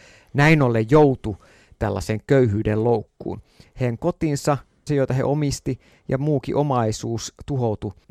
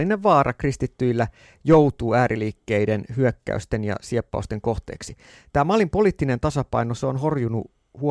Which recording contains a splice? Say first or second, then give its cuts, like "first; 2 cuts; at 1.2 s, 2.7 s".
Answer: first; 1 cut; at 4.9 s